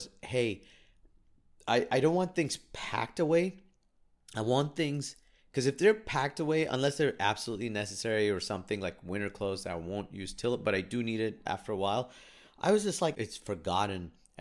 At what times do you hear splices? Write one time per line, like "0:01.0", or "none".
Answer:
0:11.4
0:13.1